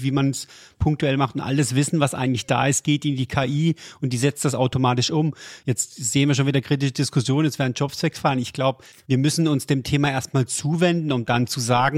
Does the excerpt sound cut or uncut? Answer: uncut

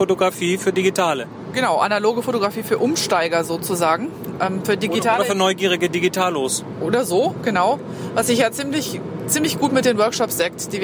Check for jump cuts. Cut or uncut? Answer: uncut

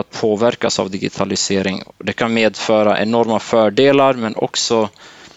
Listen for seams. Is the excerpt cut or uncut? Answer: uncut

